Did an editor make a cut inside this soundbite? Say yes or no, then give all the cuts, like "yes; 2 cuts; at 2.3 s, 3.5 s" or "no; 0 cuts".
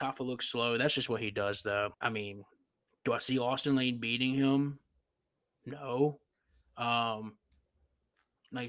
yes; 1 cut; at 1.9 s